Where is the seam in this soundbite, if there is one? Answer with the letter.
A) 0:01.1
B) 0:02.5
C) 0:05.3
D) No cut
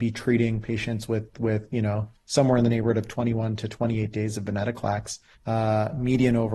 C